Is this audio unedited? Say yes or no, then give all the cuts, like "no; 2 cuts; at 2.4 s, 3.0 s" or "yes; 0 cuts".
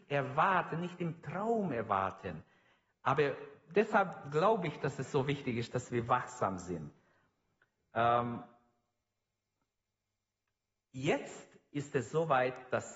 yes; 0 cuts